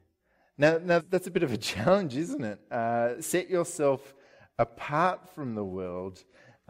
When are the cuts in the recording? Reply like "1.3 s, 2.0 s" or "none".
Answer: 1.0 s, 3.2 s